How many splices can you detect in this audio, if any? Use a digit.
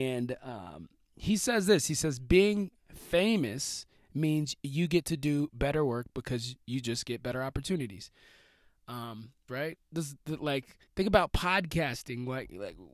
2